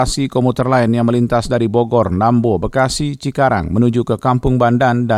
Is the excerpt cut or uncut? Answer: uncut